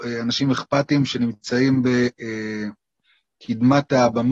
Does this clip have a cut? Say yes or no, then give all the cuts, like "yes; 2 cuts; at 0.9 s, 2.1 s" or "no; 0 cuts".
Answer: no; 0 cuts